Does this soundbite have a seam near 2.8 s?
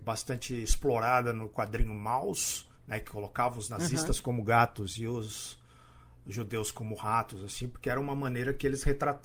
yes; 1 cut; at 2.8 s

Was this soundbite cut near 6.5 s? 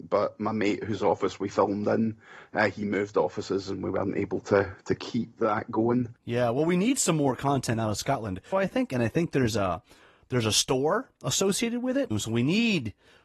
no; 2 cuts; at 8.5 s, 12.1 s

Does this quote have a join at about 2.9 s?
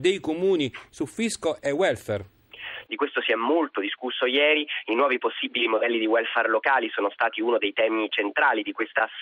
yes; 1 cut; at 2.9 s

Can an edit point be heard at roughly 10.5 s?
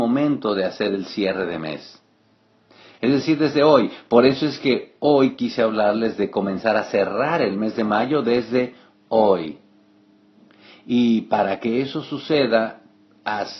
no; 1 cut; at 2.9 s

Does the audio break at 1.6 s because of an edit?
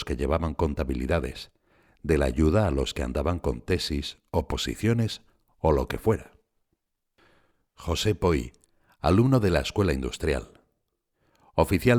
no; 0 cuts

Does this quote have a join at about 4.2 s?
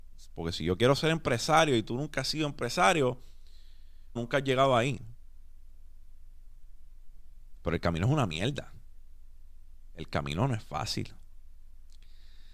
yes; 2 cuts; at 4.2 s, 7.6 s

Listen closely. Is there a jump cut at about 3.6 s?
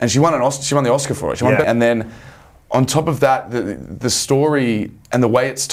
no; 1 cut; at 1.6 s

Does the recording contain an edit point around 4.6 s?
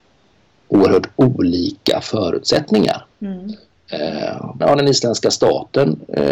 yes; 1 cut; at 4.6 s

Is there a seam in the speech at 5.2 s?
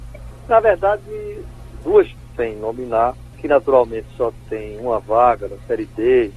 no; 2 cuts; at 2.2 s, 3.3 s

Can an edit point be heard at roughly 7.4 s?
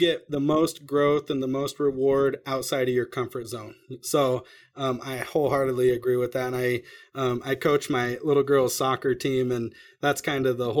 no; 0 cuts

